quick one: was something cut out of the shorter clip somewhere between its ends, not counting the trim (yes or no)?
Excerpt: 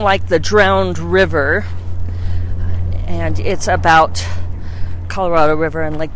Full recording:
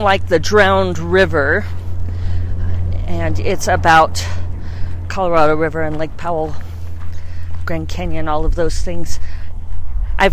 no